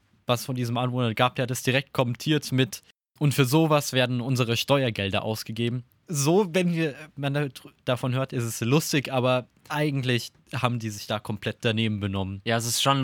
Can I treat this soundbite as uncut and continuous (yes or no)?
yes